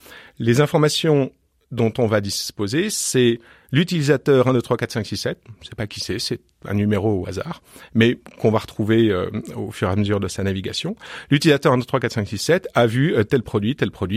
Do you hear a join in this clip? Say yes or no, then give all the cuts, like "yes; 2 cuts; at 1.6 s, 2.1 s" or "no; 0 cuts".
no; 0 cuts